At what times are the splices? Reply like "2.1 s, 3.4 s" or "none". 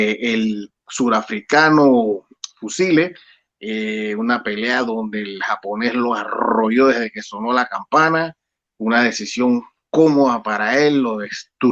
none